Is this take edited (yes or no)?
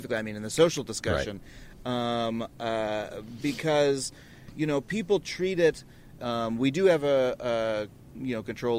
yes